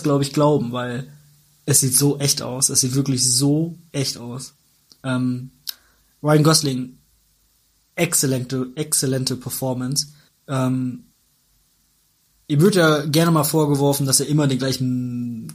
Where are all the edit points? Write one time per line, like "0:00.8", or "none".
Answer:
0:10.3